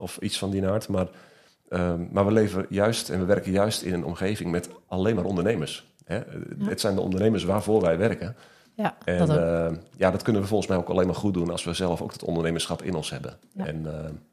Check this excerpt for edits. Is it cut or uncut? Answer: uncut